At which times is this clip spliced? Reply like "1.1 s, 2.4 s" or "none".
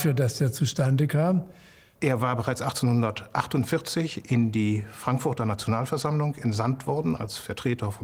1.9 s

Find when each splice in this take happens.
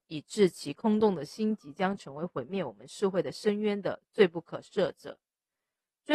none

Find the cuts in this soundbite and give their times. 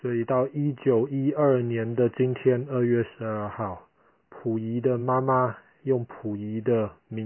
none

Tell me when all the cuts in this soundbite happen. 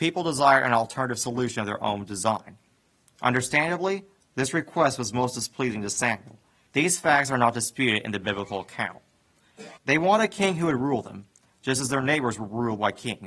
3.1 s, 6.7 s, 9.8 s

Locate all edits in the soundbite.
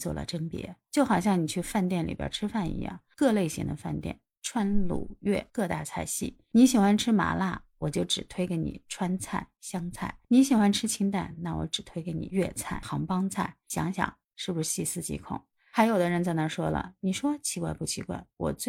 none

